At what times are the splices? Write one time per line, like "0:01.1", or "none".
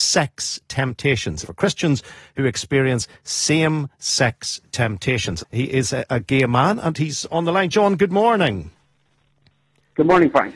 0:01.4
0:05.4